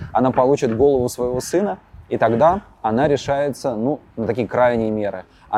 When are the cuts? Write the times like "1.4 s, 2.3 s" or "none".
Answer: none